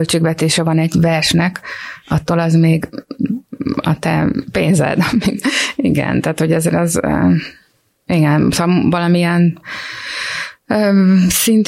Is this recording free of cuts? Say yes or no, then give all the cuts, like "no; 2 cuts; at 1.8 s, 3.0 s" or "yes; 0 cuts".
yes; 0 cuts